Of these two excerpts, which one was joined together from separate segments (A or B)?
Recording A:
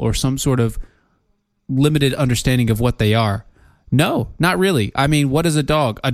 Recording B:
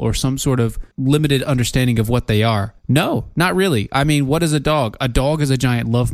B